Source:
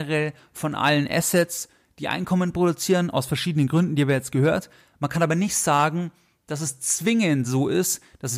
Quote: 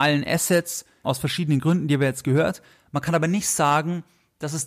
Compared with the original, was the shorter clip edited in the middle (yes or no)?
yes